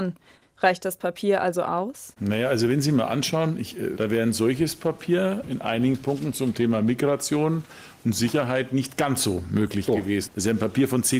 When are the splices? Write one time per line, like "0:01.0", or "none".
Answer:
0:04.0